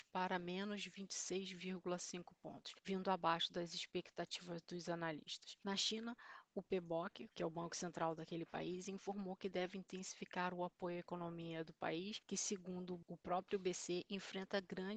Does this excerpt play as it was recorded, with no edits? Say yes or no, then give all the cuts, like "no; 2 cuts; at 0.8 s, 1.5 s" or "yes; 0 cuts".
yes; 0 cuts